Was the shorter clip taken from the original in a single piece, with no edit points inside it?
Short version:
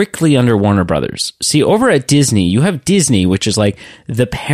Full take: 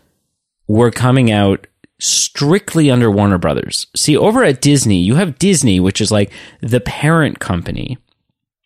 yes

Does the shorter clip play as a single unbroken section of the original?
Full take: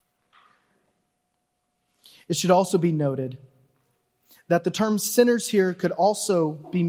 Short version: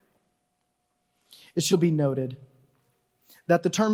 no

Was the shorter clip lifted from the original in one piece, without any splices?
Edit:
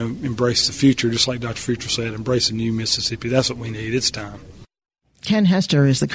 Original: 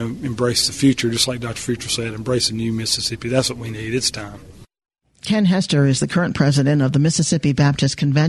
yes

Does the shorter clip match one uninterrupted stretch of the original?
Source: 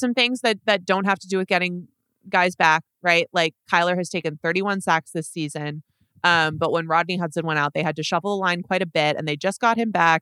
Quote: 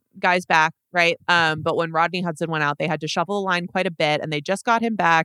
no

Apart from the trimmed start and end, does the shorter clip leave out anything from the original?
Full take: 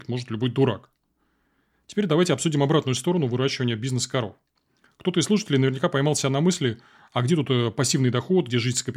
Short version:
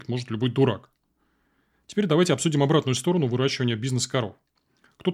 no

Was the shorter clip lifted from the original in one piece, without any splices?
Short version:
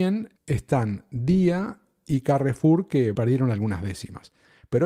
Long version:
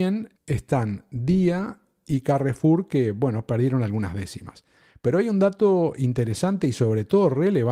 no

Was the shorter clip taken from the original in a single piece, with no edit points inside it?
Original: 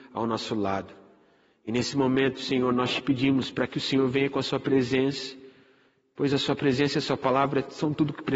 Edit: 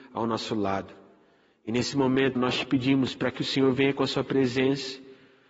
no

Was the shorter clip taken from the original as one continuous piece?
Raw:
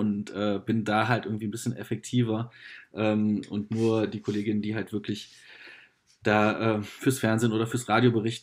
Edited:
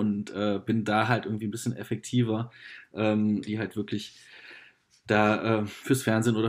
no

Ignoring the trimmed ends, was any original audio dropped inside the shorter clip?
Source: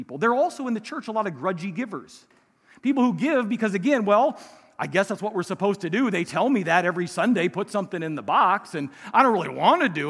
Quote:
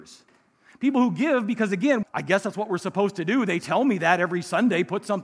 yes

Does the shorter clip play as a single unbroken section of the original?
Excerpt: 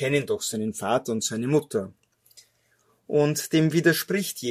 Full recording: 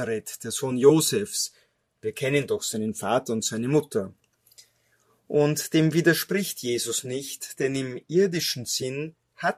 yes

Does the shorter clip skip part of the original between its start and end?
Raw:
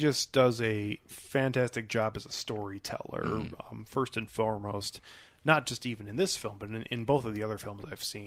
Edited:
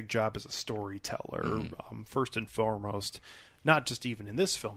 no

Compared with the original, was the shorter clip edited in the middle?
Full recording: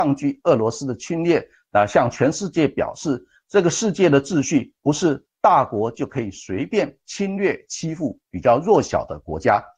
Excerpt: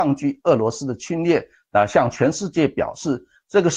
no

